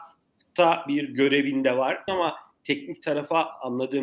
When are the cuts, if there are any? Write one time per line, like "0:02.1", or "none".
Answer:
0:02.1